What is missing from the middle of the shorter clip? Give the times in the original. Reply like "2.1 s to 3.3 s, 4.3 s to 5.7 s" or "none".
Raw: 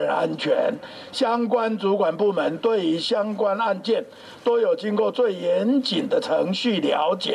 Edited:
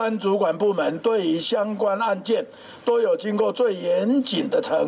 none

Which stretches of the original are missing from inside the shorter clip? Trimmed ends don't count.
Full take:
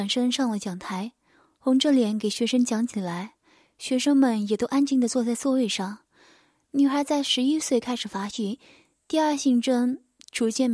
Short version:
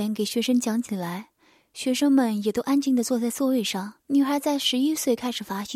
6.0 s to 6.6 s

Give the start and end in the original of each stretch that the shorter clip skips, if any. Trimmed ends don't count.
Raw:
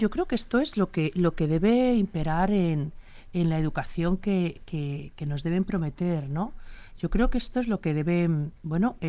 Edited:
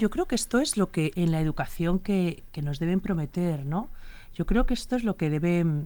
1.1 s to 3.3 s, 4.7 s to 5.1 s

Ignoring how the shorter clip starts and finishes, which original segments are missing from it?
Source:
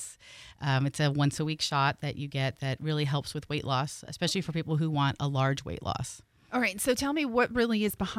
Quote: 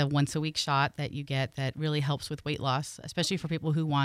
none

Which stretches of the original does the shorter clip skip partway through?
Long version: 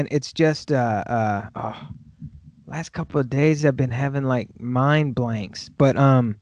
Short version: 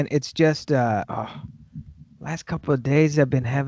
1.0 s to 1.5 s

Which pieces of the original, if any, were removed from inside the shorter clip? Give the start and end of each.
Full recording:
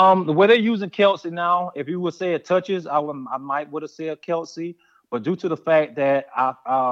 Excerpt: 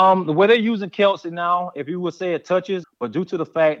2.8 s to 4.9 s

